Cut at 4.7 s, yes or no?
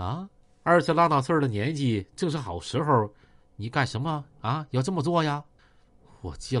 no